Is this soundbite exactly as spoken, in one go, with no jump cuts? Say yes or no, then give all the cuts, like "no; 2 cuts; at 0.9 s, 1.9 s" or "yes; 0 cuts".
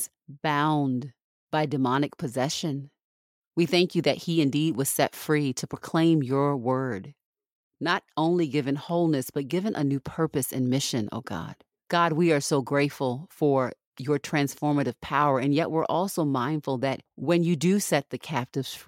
no; 1 cut; at 11.7 s